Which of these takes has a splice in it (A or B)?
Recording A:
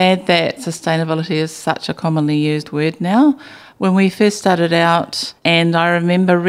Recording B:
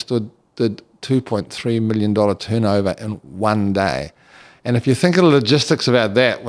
A